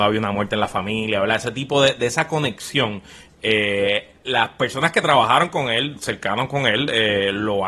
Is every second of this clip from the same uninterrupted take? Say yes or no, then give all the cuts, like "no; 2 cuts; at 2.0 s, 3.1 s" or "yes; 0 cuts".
yes; 0 cuts